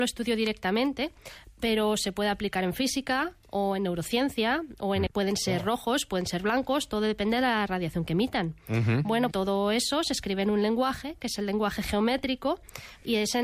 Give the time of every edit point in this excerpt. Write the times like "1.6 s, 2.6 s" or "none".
5.1 s, 9.3 s